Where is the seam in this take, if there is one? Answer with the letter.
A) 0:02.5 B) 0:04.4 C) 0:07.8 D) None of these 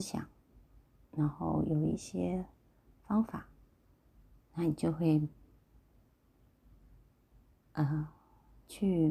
D